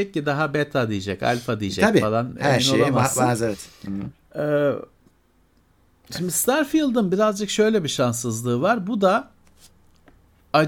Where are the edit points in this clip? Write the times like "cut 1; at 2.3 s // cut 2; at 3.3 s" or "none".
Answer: none